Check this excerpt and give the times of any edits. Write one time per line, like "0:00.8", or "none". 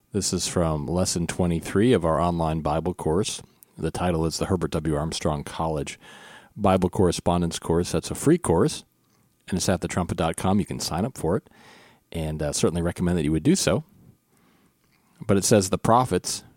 none